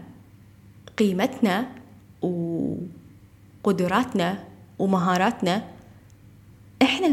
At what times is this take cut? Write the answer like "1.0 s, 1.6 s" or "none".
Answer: none